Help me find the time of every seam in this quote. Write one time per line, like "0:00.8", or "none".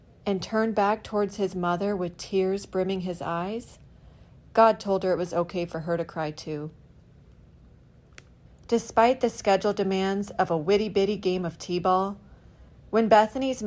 0:08.5